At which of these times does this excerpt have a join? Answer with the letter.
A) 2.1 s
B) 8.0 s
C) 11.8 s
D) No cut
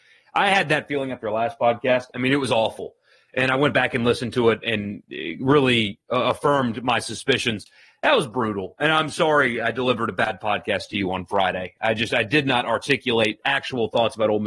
A